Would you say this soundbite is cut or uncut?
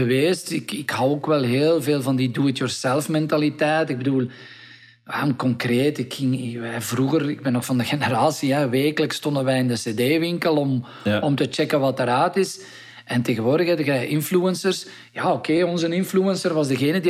uncut